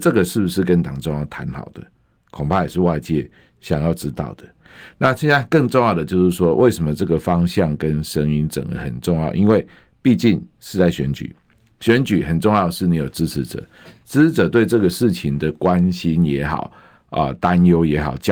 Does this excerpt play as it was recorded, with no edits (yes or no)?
yes